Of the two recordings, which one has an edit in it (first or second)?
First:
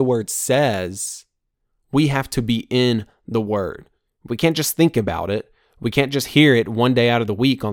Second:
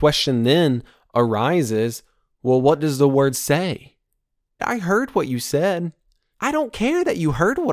second